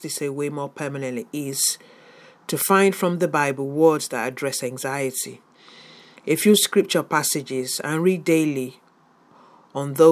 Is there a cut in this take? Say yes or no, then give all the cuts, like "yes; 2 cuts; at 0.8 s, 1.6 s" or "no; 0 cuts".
no; 0 cuts